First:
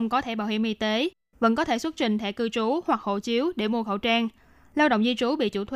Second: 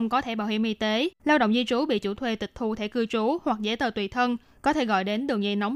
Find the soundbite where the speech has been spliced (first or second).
second